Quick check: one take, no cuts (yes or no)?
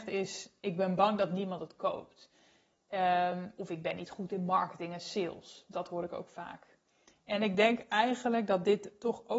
yes